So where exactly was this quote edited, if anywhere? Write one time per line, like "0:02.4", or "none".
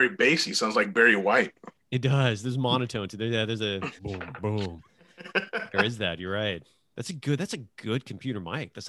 0:04.0